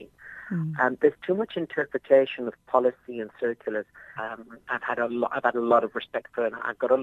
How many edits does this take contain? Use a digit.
1